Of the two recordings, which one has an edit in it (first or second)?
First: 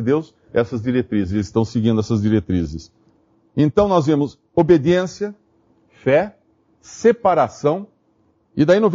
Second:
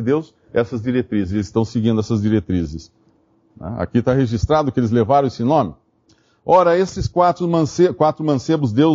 second